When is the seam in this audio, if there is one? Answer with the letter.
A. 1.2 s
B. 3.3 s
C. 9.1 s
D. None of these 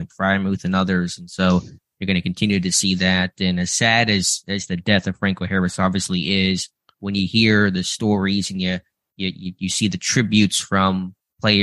D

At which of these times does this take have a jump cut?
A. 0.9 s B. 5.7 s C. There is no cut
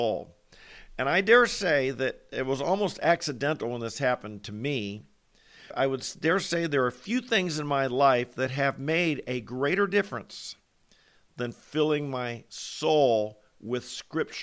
B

